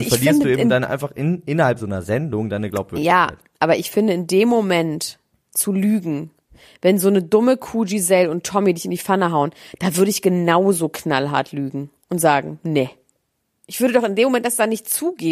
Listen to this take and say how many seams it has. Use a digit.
0